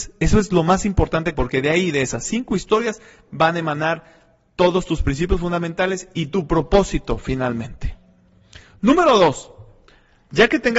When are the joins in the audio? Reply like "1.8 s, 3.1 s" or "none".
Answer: 1.3 s